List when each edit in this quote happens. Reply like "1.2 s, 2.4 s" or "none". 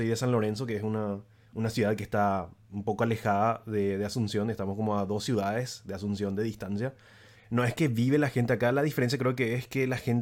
7.4 s